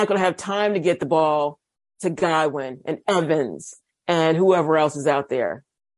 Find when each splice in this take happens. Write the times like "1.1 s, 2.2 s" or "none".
none